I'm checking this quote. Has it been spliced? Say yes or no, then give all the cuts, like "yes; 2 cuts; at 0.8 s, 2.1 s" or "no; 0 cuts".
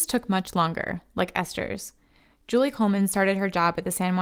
no; 0 cuts